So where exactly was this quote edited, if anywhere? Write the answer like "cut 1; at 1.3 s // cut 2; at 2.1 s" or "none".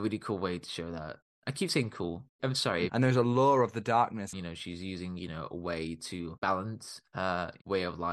cut 1; at 2.9 s // cut 2; at 4.3 s